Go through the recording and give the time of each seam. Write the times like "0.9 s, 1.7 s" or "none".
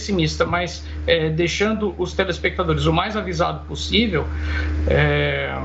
none